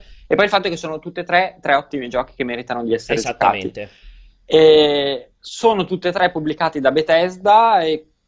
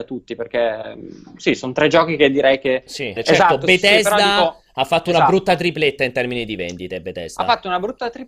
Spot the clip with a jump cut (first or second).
second